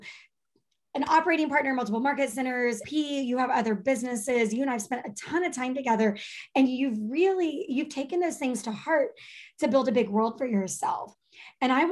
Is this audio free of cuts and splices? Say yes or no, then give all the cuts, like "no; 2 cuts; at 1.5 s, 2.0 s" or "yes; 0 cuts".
no; 1 cut; at 2.8 s